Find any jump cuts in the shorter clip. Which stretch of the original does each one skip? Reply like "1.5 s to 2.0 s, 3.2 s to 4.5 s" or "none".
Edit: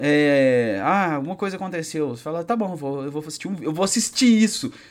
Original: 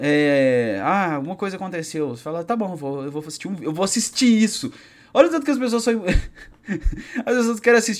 none

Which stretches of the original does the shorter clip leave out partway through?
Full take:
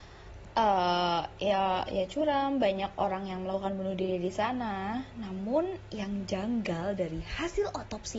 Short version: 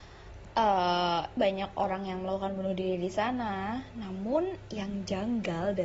1.4 s to 2.6 s

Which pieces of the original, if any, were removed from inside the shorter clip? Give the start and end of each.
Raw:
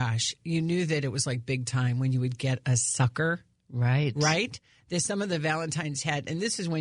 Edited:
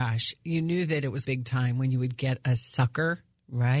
1.2 s to 1.5 s

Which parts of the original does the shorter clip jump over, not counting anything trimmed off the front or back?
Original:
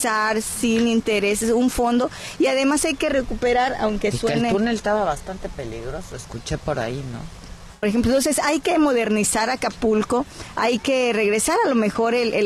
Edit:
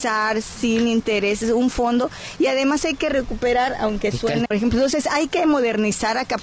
4.5 s to 7.8 s

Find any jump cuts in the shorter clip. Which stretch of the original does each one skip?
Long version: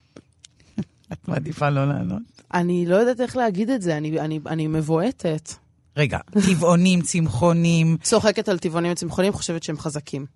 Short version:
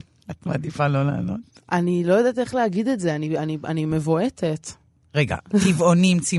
none

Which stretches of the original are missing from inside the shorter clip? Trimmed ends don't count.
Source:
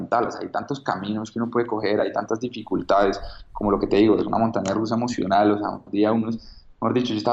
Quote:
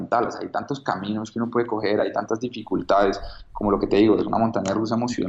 none

